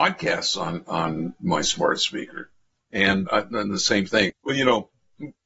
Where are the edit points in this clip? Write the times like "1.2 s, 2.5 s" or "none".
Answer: 3.3 s, 4.3 s